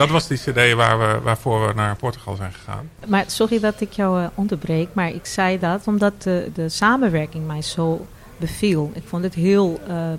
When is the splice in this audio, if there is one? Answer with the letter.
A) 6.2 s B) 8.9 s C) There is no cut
C